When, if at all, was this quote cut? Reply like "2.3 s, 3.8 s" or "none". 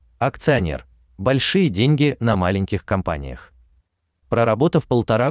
4.1 s